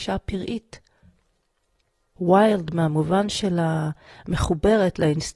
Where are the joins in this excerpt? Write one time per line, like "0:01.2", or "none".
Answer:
0:02.2